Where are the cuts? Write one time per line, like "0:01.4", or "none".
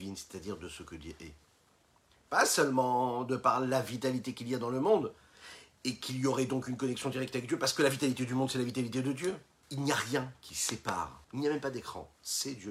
0:09.6
0:11.2